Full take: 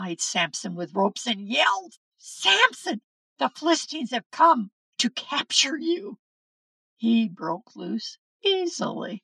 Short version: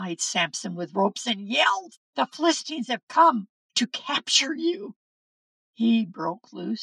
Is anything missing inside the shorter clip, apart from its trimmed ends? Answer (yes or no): yes